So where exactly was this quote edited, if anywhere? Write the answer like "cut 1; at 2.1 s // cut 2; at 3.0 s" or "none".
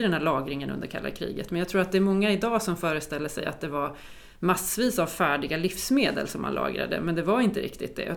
none